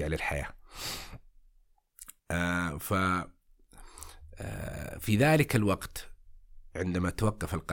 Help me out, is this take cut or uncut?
cut